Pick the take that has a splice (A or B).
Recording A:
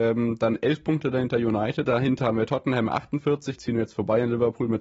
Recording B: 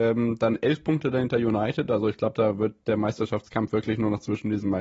A